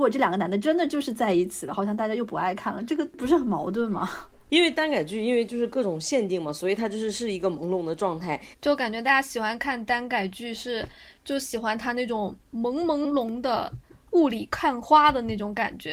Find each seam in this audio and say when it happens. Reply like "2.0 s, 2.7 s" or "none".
8.5 s, 13.0 s